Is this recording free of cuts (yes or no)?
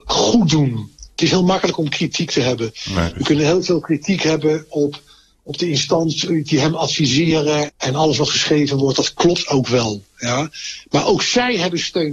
no